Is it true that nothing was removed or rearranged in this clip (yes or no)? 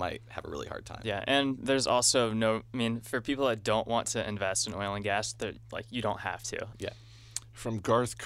no